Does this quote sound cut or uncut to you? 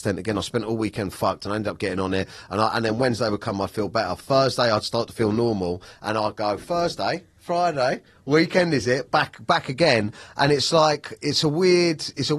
uncut